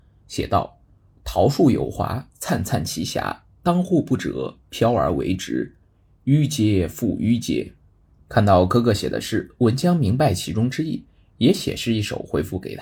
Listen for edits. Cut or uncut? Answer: uncut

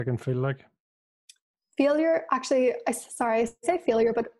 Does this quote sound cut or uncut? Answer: uncut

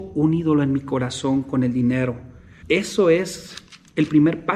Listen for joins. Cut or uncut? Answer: cut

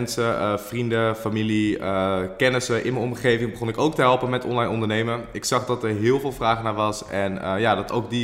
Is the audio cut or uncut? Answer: uncut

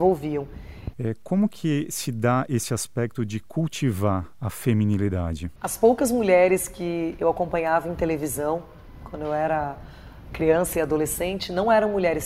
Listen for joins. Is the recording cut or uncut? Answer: cut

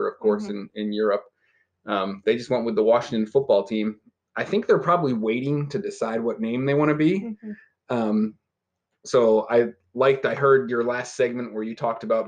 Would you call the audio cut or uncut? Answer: uncut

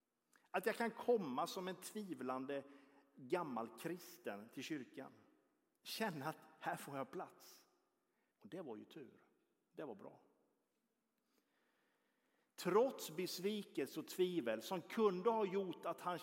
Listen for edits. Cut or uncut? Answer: cut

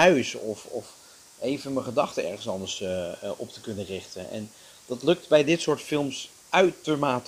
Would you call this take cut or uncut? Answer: uncut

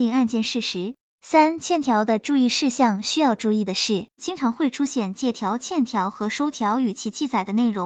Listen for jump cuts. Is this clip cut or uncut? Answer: cut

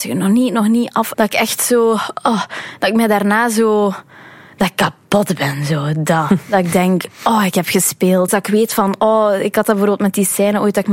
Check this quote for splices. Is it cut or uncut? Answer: cut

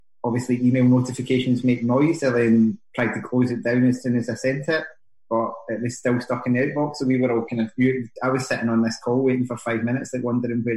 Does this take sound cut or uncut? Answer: uncut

